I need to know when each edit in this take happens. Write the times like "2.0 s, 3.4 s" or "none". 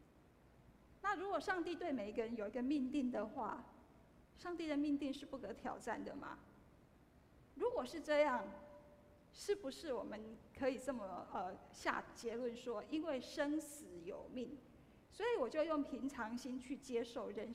none